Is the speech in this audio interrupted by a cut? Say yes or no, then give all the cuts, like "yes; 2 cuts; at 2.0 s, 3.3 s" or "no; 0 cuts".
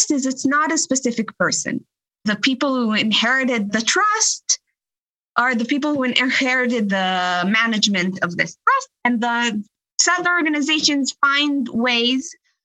no; 0 cuts